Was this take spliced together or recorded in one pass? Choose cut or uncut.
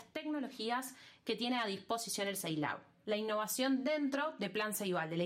cut